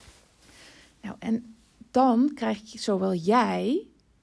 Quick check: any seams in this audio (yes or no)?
no